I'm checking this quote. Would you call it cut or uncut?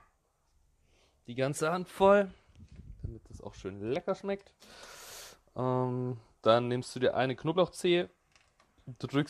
uncut